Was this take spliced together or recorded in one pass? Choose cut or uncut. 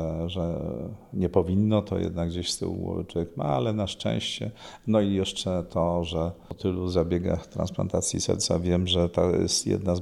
uncut